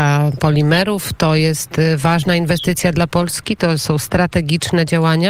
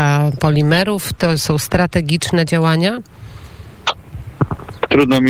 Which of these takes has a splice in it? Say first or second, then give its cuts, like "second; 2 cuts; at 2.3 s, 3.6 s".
second; 1 cut; at 1.2 s